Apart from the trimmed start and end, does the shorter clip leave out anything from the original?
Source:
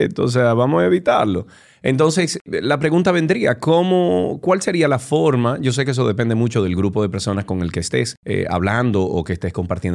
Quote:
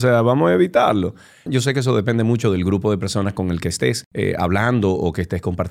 yes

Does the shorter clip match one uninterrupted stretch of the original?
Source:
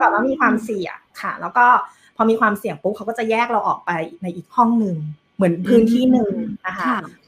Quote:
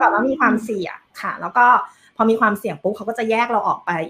yes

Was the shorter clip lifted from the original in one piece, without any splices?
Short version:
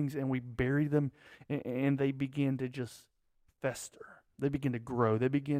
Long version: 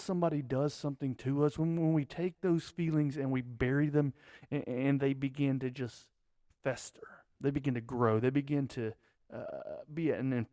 yes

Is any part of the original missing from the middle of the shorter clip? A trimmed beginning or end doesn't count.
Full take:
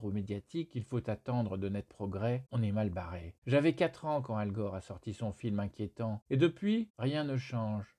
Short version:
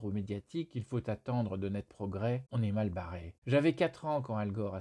no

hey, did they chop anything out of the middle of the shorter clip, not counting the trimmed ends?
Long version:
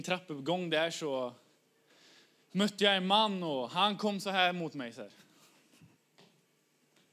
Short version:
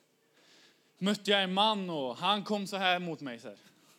no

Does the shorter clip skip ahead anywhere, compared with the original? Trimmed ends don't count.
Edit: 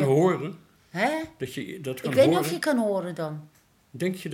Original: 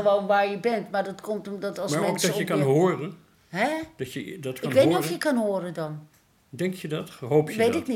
no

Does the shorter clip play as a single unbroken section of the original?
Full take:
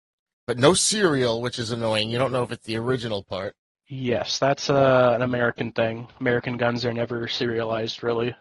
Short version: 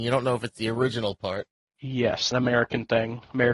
no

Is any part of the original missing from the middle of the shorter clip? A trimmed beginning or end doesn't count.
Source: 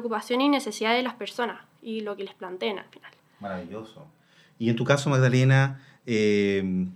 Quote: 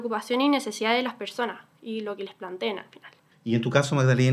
yes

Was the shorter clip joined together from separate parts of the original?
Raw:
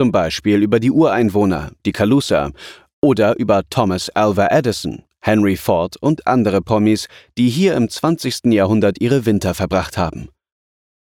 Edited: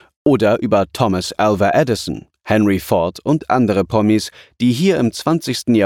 no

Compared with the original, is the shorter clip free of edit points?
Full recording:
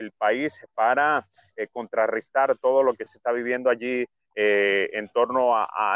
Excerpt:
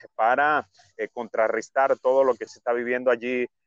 yes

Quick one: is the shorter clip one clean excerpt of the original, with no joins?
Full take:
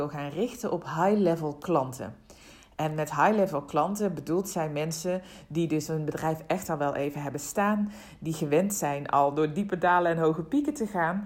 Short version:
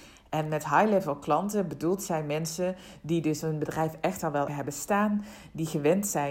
no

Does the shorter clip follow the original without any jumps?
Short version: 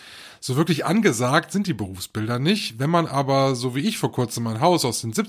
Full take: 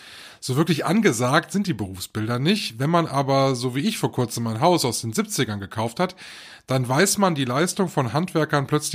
yes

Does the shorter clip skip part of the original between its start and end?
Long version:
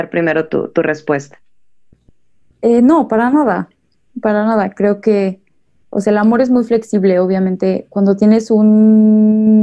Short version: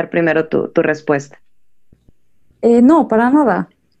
no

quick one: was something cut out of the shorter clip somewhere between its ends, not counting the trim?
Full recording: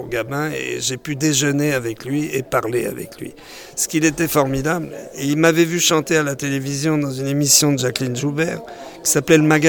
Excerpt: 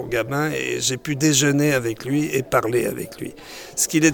no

